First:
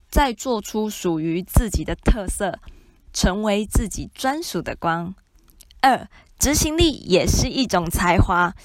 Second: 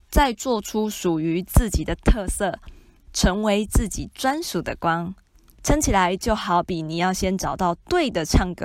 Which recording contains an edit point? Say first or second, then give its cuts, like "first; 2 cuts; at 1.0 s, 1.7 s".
second; 1 cut; at 5.5 s